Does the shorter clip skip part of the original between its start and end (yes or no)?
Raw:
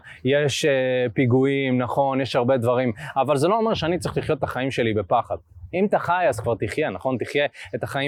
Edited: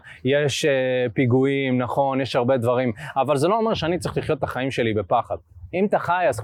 no